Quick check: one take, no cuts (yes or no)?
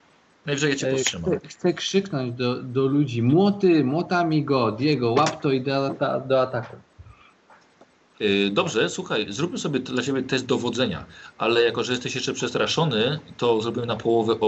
yes